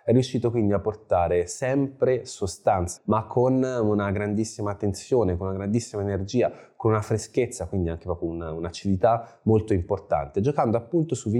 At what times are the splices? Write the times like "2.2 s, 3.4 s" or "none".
3.0 s